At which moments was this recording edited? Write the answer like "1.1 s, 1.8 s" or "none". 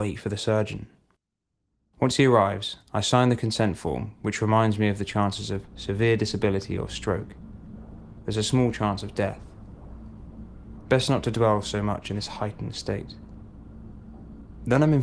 none